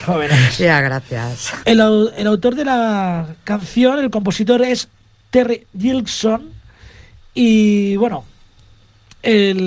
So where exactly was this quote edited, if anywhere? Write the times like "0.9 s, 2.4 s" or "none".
1.6 s